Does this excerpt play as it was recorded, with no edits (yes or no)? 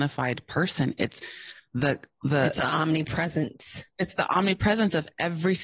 yes